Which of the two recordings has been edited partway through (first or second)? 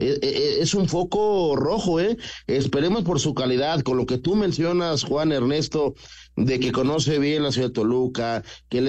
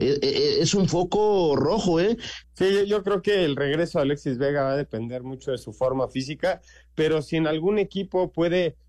second